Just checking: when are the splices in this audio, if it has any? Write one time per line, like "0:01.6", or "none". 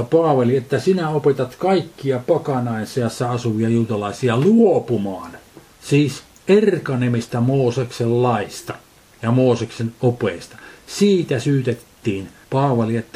0:05.7